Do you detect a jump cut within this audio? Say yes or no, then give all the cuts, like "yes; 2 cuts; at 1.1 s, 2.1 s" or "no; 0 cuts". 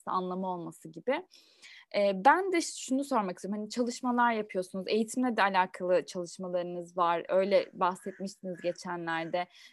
no; 0 cuts